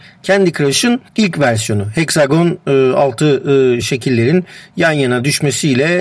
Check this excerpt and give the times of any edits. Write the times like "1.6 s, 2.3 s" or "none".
1.1 s, 3.8 s